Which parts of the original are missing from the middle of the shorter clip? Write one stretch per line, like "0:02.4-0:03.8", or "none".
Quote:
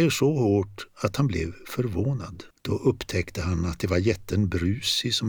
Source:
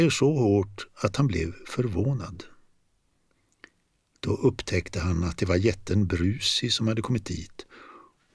0:02.5-0:04.1